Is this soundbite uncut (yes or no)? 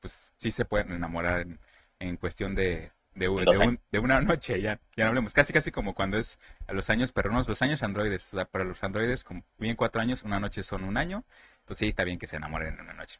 yes